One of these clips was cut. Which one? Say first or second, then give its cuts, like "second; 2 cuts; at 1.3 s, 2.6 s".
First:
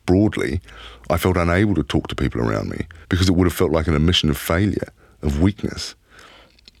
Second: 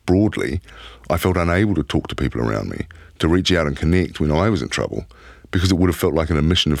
first; 1 cut; at 3.0 s